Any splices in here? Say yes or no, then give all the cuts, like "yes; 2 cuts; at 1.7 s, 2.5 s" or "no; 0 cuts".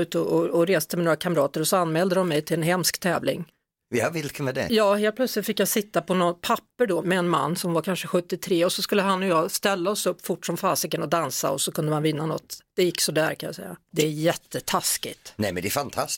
yes; 2 cuts; at 7.0 s, 13.9 s